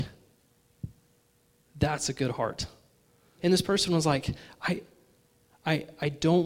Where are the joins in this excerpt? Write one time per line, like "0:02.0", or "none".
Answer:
0:03.4